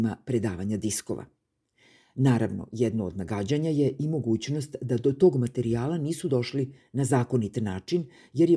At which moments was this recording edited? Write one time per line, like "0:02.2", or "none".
none